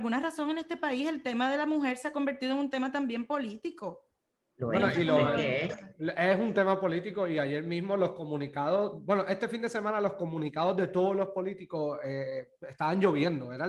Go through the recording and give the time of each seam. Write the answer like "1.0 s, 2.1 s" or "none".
none

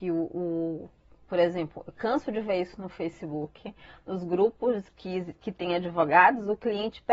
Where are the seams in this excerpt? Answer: none

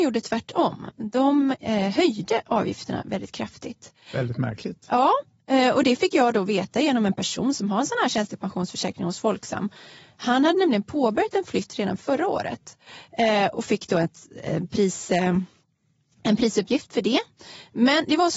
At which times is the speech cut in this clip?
none

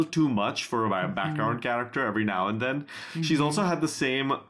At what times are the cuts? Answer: none

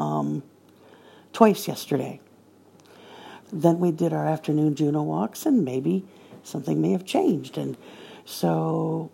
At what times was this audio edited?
3.4 s

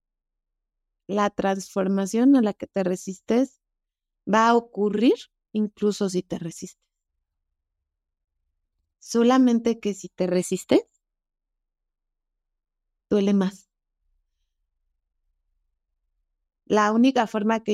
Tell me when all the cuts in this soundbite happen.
8.9 s, 13.0 s

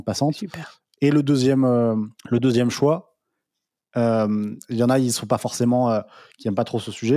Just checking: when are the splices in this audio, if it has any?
2.2 s

